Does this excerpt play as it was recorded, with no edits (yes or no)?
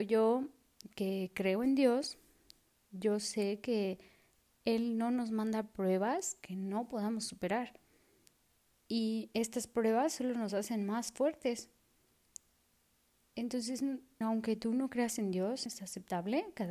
no